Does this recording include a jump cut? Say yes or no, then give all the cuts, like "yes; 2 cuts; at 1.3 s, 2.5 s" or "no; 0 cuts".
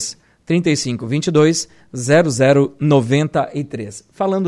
no; 0 cuts